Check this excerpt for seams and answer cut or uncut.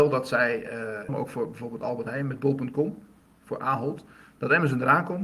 cut